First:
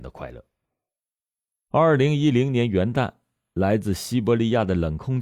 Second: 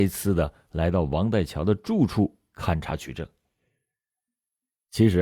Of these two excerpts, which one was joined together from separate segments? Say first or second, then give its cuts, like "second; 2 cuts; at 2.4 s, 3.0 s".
first; 1 cut; at 1.5 s